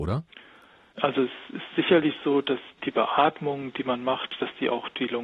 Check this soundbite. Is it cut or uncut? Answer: uncut